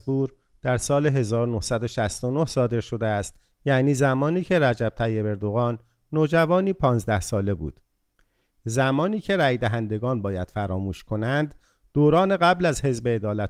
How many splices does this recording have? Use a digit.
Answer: 1